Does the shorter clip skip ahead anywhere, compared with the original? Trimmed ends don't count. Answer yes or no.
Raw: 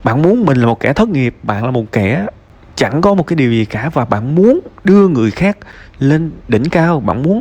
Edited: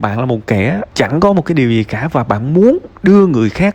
yes